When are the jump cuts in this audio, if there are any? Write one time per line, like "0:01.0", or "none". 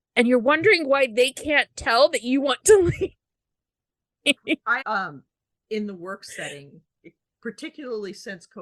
0:04.8